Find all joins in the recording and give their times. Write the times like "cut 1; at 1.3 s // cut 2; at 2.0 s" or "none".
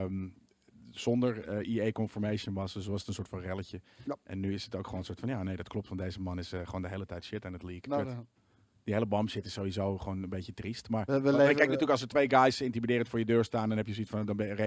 cut 1; at 7.9 s